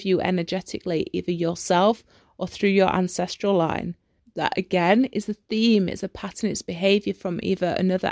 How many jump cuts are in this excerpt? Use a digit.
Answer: 1